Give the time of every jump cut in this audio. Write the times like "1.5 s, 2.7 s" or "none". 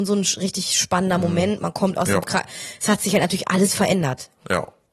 none